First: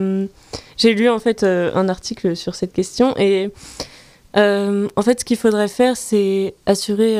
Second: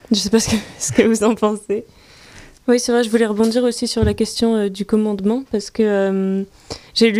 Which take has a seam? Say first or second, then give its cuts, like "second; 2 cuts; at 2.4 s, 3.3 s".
second; 1 cut; at 2.6 s